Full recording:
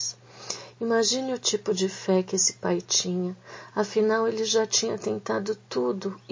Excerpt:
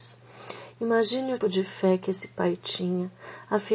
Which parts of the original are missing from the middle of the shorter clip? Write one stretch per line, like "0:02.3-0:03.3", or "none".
0:01.4-0:01.6